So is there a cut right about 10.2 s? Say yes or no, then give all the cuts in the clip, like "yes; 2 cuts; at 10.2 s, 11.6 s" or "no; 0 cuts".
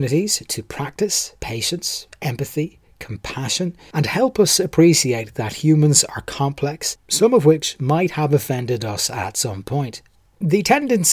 no; 2 cuts; at 3.9 s, 7.0 s